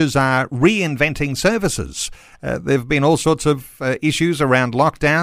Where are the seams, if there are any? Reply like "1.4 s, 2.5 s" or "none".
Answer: none